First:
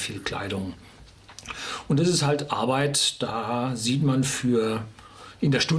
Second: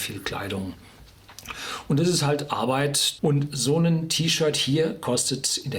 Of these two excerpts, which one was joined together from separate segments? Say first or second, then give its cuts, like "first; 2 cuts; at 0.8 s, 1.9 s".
second; 1 cut; at 3.2 s